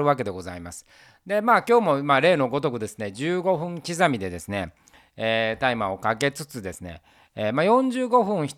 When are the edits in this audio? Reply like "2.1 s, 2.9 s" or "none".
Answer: none

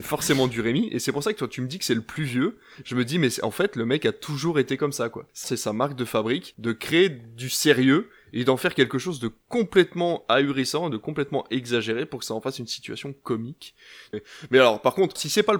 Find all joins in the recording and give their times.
5.4 s, 14.1 s

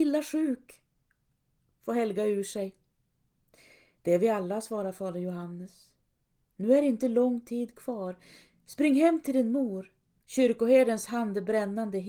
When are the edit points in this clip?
10.2 s

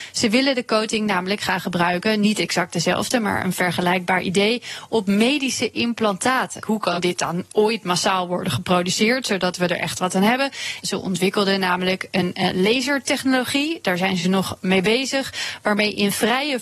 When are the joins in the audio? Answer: 6.6 s, 10.8 s

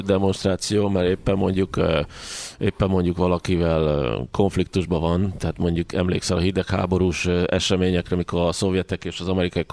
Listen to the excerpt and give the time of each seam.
none

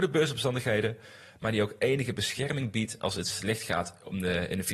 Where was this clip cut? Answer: none

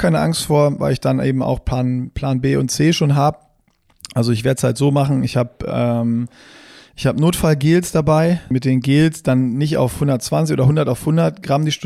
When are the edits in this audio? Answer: 8.5 s

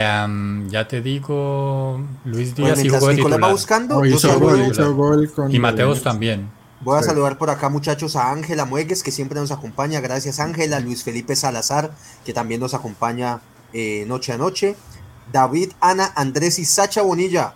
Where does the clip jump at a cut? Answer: none

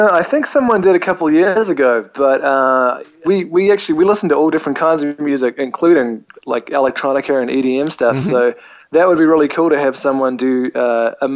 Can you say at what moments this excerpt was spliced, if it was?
3.2 s

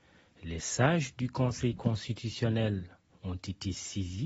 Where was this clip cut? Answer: 3.1 s

